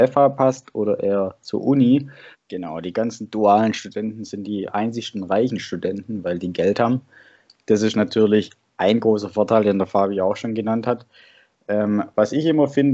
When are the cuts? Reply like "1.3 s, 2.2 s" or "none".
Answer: 2.3 s

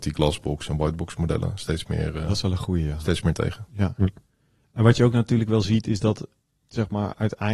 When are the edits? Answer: none

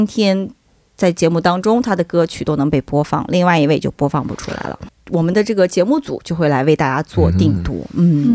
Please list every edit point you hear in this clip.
4.9 s

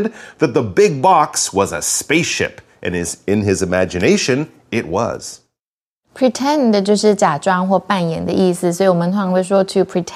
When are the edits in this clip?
none

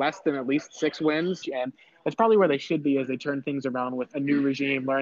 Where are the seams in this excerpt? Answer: 1.4 s, 4.1 s

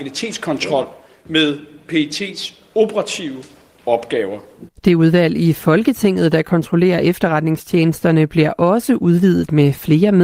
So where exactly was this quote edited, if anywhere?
4.7 s

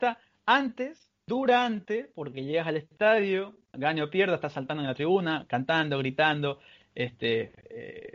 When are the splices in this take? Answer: 3.7 s

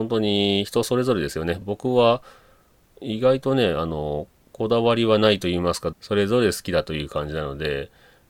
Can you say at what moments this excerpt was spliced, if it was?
1.6 s, 5.9 s

